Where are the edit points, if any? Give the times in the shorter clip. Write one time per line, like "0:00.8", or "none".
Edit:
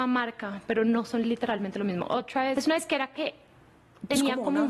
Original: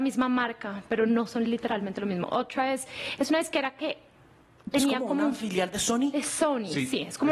0:02.5